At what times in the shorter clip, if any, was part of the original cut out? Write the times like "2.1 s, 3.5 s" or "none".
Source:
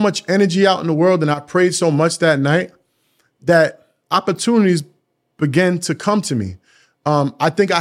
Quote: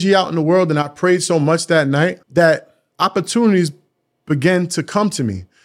2.2 s